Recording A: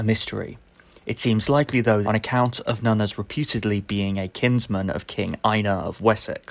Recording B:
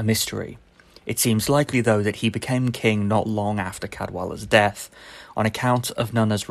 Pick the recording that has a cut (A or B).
A